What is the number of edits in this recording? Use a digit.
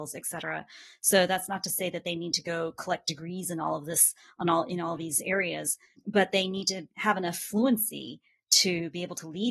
0